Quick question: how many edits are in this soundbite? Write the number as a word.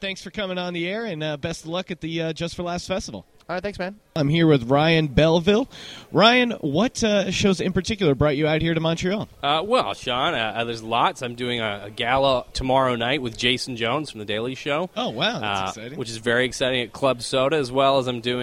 zero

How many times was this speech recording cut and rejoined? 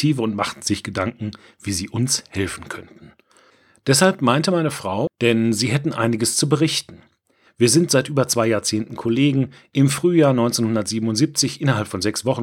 two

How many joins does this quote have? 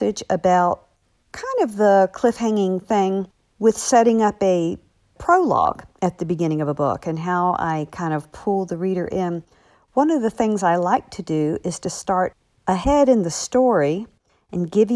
zero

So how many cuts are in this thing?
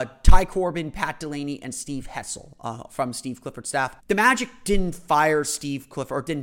one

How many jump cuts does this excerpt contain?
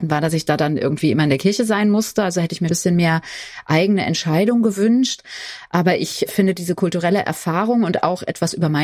one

